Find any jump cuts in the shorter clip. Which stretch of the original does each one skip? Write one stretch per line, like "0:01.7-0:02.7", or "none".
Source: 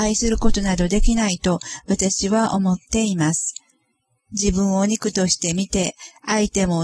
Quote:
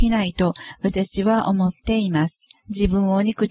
0:03.6-0:04.2